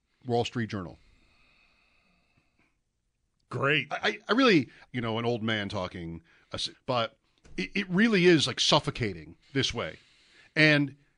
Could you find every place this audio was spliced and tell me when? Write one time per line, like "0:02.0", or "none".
0:04.9
0:06.7
0:09.4